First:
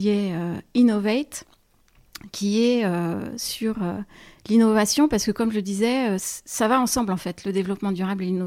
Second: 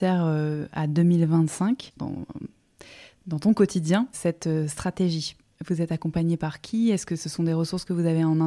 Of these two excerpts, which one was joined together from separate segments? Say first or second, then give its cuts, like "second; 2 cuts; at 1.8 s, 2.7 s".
second; 2 cuts; at 2.0 s, 4.1 s